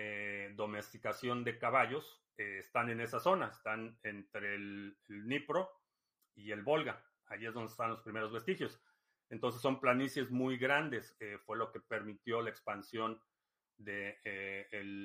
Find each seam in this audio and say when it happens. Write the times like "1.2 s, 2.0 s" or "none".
none